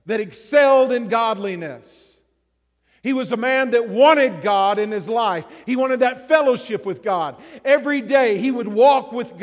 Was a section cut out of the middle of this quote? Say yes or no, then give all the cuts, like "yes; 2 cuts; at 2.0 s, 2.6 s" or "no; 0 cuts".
no; 0 cuts